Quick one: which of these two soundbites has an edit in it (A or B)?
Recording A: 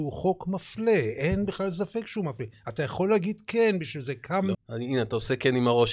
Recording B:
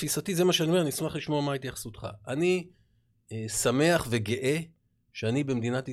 A